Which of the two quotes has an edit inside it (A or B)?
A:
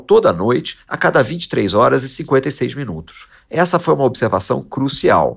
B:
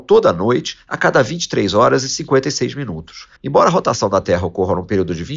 B